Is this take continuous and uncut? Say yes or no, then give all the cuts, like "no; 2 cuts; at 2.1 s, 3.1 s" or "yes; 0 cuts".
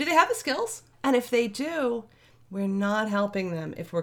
no; 1 cut; at 0.9 s